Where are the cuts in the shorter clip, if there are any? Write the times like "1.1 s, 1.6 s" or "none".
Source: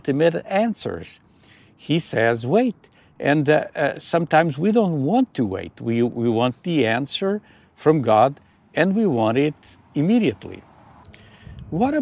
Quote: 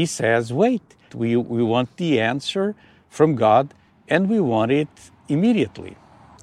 1.1 s